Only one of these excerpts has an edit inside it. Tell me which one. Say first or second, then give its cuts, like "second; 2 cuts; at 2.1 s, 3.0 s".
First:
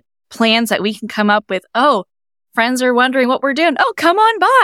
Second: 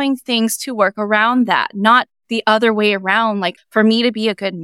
second; 1 cut; at 3.6 s